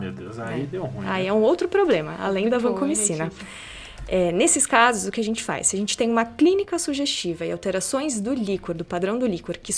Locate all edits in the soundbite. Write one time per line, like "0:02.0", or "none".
none

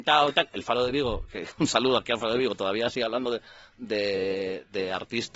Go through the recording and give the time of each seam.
none

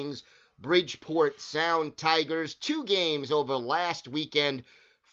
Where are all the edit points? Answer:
none

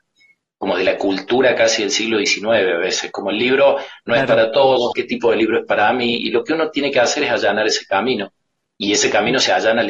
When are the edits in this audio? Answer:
0:04.9

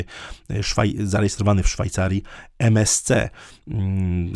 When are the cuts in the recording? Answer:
none

